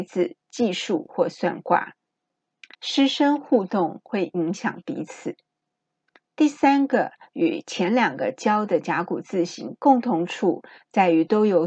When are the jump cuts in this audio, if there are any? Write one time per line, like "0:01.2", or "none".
0:02.7